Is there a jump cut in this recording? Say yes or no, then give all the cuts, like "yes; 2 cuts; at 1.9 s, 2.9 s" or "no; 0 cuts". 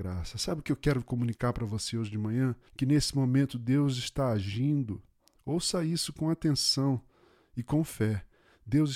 yes; 1 cut; at 2.7 s